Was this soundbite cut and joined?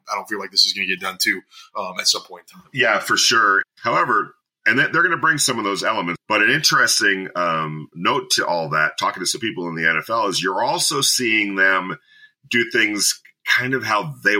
yes; 2 cuts; at 3.6 s, 6.2 s

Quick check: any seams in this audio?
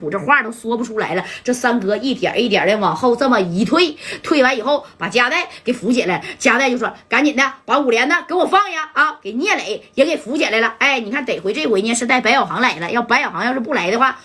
no; 0 cuts

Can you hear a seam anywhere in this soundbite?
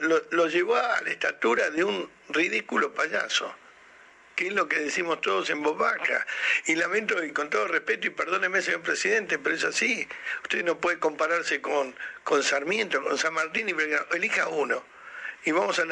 no; 0 cuts

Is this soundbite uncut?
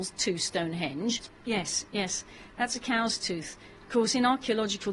no; 1 cut; at 1.3 s

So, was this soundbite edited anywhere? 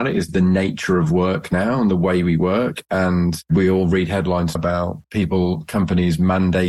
yes; 1 cut; at 4.5 s

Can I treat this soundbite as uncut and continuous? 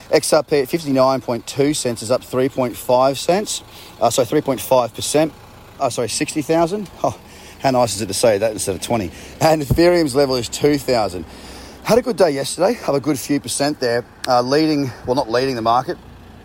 no; 1 cut; at 5.8 s

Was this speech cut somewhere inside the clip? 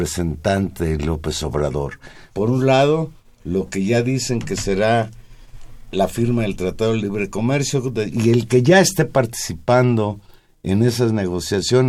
yes; 2 cuts; at 2.3 s, 8.1 s

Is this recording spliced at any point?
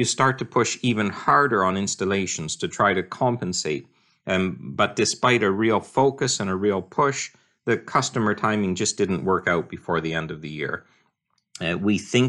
no; 0 cuts

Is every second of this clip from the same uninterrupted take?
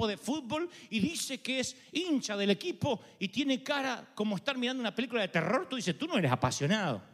yes; 0 cuts

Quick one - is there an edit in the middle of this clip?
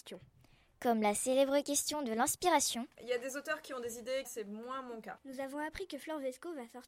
yes; 2 cuts; at 2.9 s, 4.2 s

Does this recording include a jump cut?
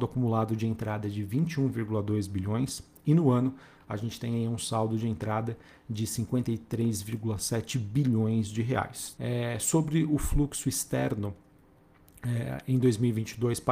yes; 1 cut; at 9.2 s

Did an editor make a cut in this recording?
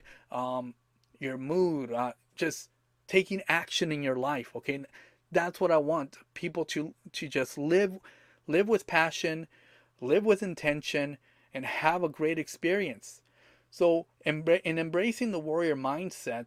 no; 0 cuts

